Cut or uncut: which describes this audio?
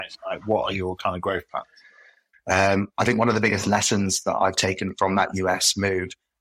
cut